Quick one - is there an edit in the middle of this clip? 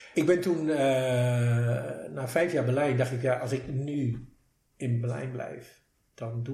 no; 0 cuts

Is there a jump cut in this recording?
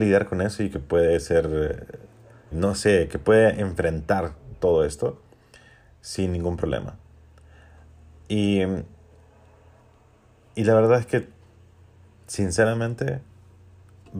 yes; 1 cut; at 2.5 s

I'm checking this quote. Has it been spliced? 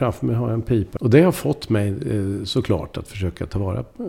yes; 1 cut; at 1.0 s

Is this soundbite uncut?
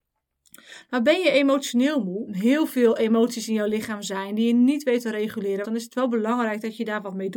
no; 2 cuts; at 2.3 s, 5.6 s

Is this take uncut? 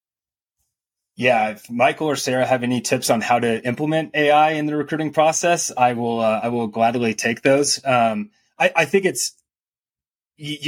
yes; 0 cuts

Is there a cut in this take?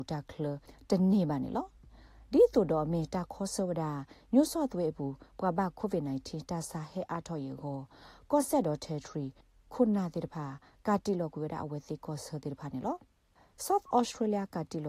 no; 0 cuts

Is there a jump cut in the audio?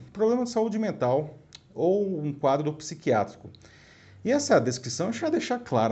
no; 0 cuts

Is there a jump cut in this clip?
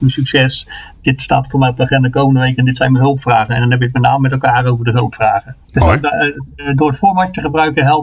yes; 1 cut; at 5.6 s

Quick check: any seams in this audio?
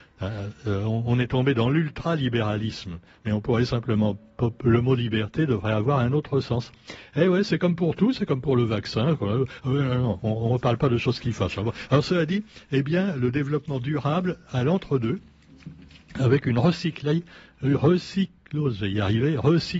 no; 0 cuts

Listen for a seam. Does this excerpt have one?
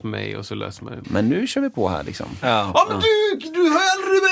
yes; 2 cuts; at 1.0 s, 2.4 s

